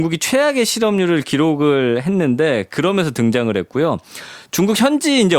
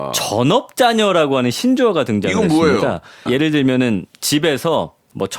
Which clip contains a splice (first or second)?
second